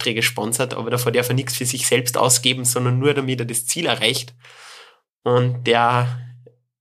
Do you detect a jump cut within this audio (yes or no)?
no